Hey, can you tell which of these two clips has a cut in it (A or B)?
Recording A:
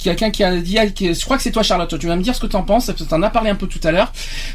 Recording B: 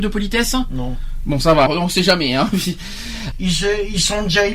B